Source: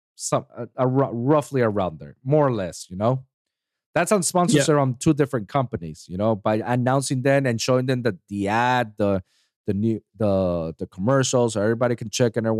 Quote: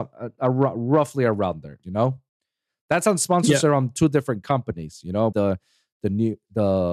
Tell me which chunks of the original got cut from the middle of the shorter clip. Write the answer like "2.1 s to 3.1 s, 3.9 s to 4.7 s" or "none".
2.2 s to 2.9 s, 6.4 s to 9.0 s